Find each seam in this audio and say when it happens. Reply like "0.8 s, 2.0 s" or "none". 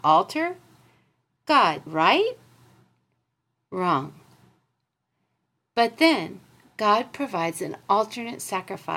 1.9 s